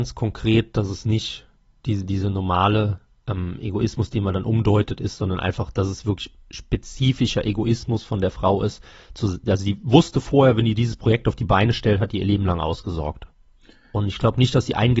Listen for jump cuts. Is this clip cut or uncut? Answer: uncut